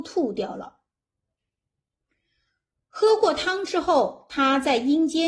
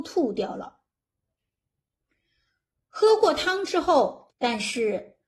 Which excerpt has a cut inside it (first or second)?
second